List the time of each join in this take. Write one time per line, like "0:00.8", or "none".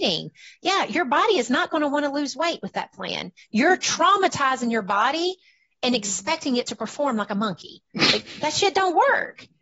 0:07.9